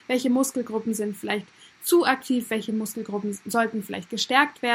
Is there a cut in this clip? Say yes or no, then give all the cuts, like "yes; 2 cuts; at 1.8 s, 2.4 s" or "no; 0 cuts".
no; 0 cuts